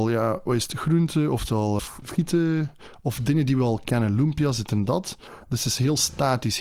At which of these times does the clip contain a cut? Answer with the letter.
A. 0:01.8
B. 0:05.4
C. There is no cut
A